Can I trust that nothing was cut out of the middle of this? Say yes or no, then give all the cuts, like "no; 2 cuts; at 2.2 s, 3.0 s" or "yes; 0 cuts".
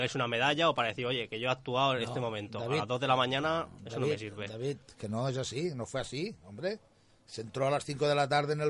yes; 0 cuts